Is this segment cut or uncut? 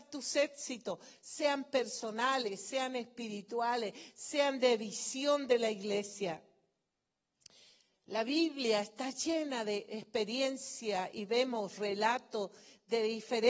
uncut